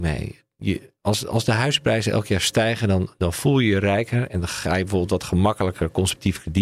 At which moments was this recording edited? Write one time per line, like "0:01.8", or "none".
none